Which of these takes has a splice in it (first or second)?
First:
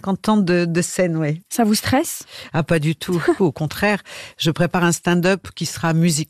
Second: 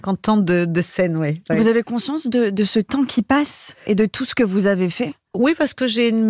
first